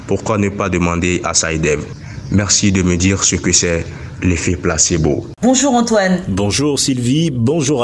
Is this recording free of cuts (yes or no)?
no